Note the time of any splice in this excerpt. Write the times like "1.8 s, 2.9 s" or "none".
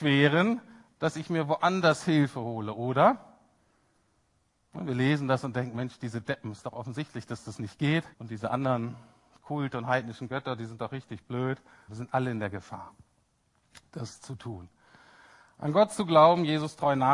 8.1 s, 11.9 s